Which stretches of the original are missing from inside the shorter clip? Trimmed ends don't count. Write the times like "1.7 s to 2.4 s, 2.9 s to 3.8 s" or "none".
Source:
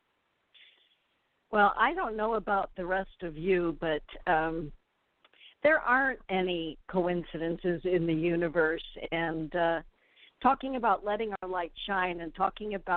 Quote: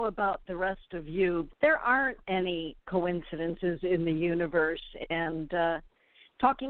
3.8 s to 5.5 s